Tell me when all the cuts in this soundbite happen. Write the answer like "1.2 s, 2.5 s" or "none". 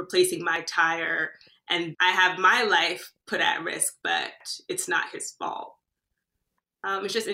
1.9 s